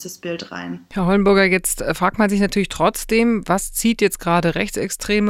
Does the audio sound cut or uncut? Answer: uncut